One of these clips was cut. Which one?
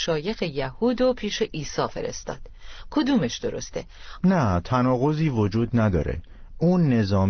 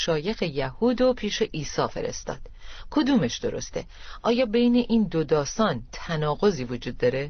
first; 1 cut; at 4.2 s

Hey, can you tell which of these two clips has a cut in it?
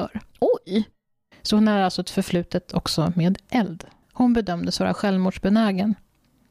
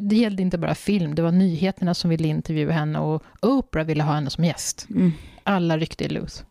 first; 1 cut; at 4.0 s

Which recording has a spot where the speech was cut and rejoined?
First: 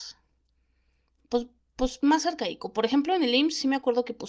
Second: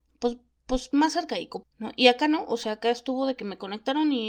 second; 1 cut; at 1.6 s

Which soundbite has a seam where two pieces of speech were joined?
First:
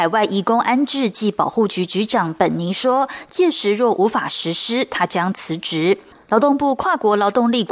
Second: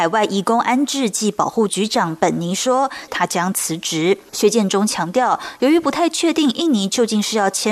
second; 3 cuts; at 1.7 s, 3.1 s, 4.3 s

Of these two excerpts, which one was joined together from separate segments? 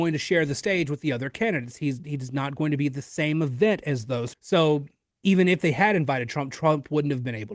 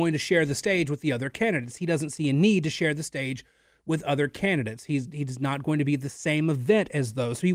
first; 2 cuts; at 1.8 s, 4.3 s

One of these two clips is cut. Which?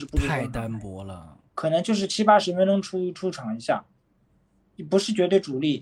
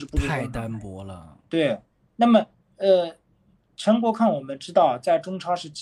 first; 1 cut; at 1.5 s

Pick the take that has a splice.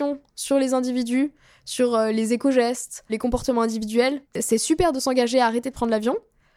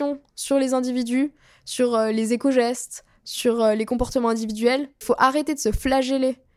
first; 2 cuts; at 3.1 s, 4.2 s

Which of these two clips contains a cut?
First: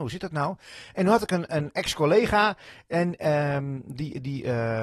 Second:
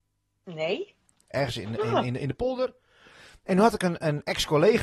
second; 2 cuts; at 1.3 s, 3.4 s

